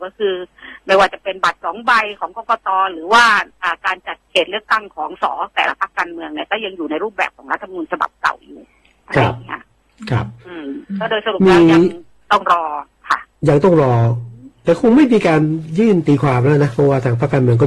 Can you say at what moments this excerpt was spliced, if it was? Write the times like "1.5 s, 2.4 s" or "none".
5.2 s